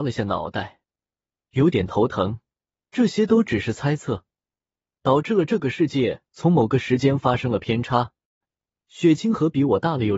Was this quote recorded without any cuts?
no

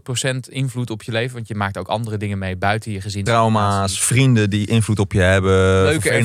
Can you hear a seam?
no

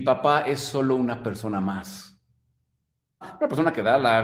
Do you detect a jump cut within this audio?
yes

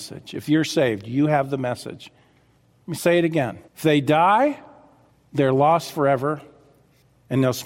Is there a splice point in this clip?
yes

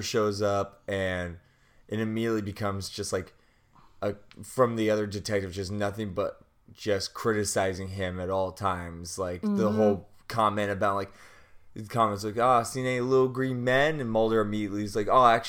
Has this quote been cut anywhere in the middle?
no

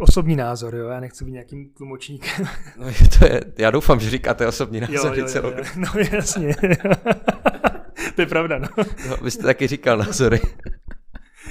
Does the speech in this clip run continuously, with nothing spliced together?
yes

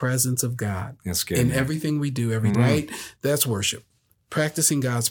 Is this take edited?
yes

